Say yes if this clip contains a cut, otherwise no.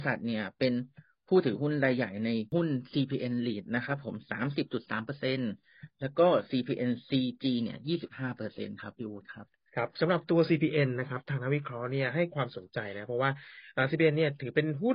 no